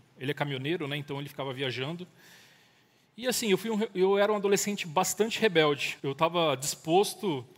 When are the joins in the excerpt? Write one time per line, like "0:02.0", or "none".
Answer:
0:06.0